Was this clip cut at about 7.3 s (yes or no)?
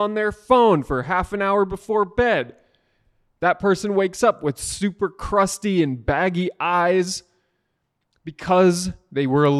no